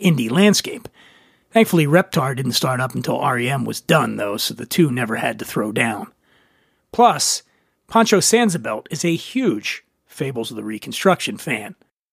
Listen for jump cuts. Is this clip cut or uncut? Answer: uncut